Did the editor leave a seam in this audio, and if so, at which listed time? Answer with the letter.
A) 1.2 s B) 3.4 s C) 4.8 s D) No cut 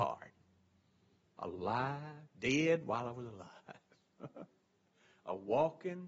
A